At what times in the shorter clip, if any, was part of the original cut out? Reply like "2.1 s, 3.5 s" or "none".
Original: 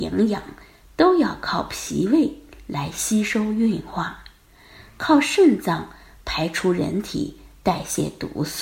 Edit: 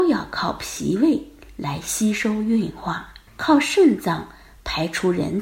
3.3 s